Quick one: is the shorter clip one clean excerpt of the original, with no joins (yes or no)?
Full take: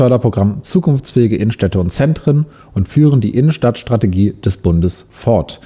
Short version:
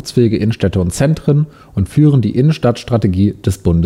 yes